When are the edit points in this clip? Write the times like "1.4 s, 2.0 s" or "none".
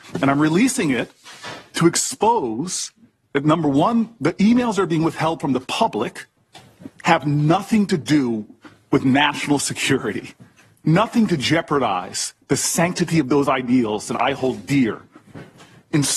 none